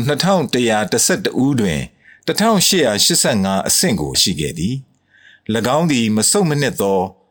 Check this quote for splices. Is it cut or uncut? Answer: cut